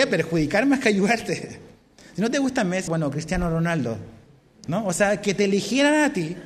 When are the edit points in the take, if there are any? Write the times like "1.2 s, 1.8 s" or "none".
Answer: 2.9 s